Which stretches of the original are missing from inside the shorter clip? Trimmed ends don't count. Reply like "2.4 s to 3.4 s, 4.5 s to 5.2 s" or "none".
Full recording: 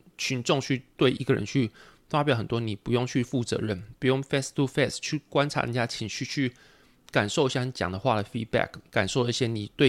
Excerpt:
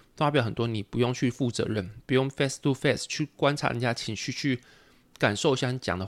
none